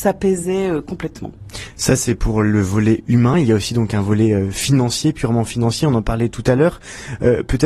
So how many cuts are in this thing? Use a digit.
0